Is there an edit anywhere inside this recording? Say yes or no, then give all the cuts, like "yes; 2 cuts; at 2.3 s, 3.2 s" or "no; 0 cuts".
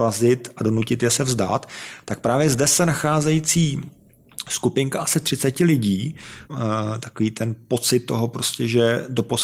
yes; 1 cut; at 6.4 s